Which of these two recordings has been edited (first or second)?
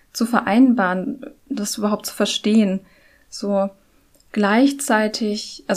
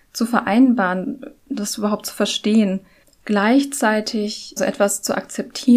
second